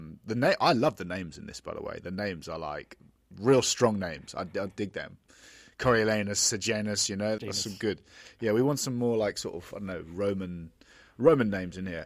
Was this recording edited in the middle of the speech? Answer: yes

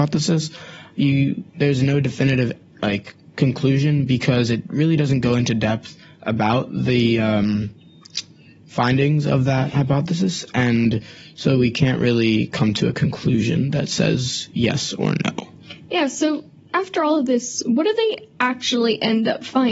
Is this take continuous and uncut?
yes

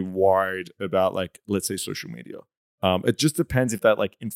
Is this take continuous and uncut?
yes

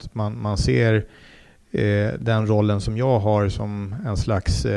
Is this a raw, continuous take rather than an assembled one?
yes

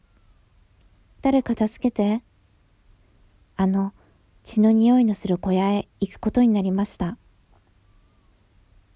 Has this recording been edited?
yes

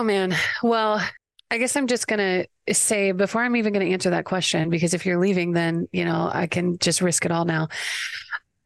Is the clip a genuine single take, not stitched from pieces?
yes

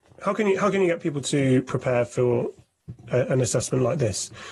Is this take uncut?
yes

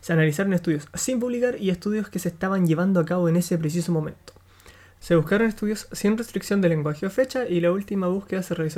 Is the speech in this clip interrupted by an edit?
yes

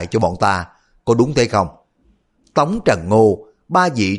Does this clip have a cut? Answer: yes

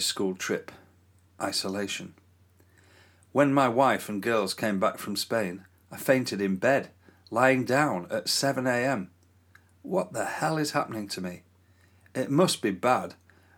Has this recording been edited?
no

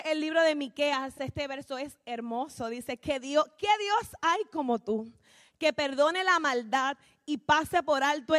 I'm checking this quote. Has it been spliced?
no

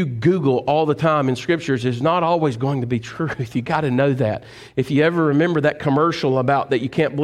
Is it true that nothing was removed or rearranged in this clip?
yes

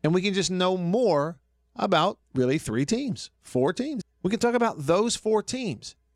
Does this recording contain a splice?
yes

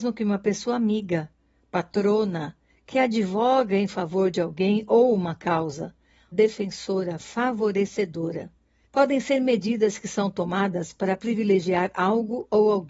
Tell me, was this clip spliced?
yes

